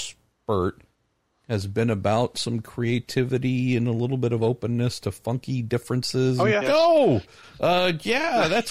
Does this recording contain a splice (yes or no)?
yes